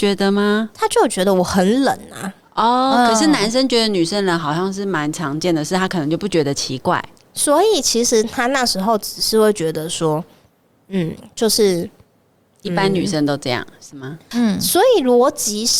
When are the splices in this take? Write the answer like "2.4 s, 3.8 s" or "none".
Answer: 14.3 s